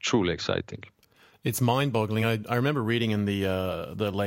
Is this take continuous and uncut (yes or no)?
yes